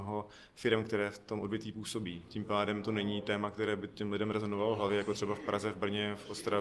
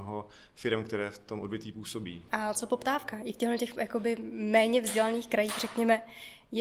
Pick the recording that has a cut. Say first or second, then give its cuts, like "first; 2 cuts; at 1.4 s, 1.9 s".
second; 1 cut; at 2.3 s